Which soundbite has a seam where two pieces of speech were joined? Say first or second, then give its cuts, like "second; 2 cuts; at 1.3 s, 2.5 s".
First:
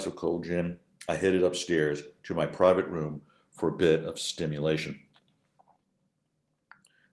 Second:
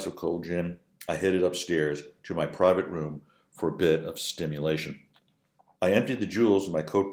second; 1 cut; at 5.7 s